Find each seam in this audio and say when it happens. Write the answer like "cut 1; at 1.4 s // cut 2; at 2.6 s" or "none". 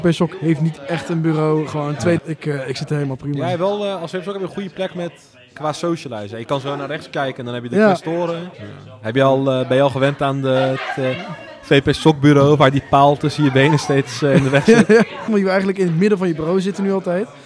cut 1; at 2.2 s // cut 2; at 8.5 s // cut 3; at 15.3 s